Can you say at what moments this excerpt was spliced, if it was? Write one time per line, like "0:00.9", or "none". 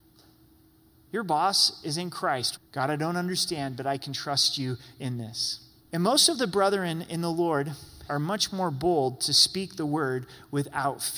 0:02.6
0:05.8
0:08.1